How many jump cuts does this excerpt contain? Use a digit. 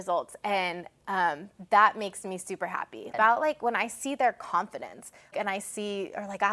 2